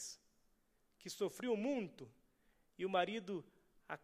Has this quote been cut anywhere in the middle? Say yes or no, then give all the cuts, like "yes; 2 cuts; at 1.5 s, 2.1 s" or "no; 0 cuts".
no; 0 cuts